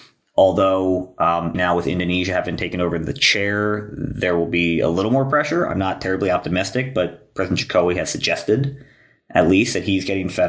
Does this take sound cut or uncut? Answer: cut